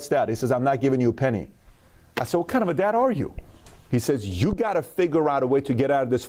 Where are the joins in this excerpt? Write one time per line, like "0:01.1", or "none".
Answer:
none